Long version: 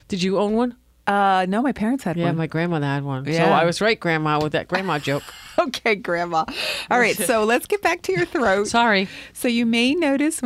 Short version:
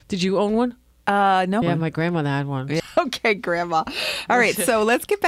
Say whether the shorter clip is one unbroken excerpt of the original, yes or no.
no